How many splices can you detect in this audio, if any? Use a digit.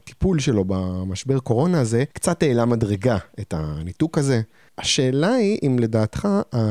2